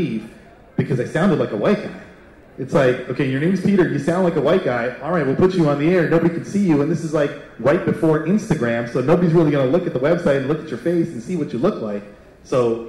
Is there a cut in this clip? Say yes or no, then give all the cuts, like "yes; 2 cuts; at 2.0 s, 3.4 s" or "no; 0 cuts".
no; 0 cuts